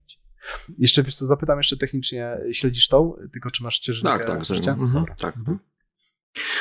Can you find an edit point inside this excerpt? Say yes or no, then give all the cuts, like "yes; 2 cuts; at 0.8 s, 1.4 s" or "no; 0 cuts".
no; 0 cuts